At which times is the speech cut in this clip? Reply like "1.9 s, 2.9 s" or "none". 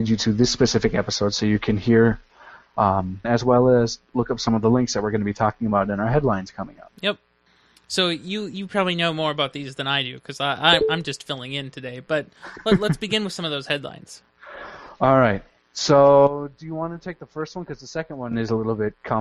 3.2 s